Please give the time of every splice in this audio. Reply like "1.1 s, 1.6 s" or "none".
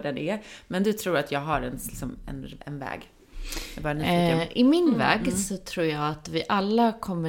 none